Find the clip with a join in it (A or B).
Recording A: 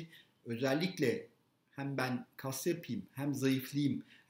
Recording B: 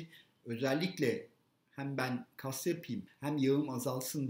B